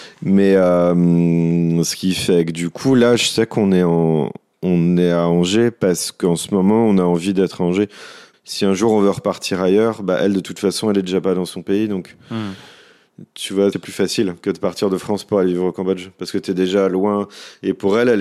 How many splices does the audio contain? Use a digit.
2